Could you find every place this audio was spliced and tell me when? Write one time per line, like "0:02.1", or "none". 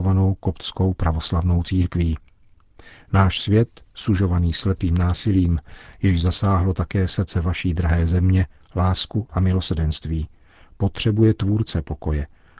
0:08.6